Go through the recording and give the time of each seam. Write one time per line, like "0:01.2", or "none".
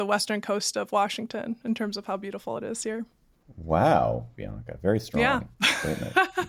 0:04.4